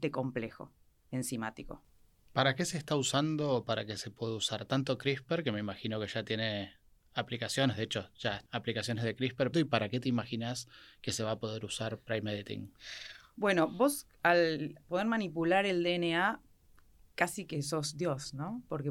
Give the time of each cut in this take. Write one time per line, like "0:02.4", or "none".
0:08.5
0:09.5